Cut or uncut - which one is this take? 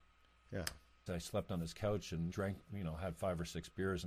cut